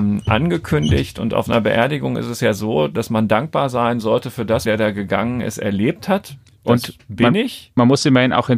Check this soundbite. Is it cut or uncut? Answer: cut